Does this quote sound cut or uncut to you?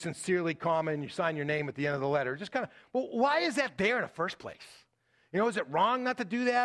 uncut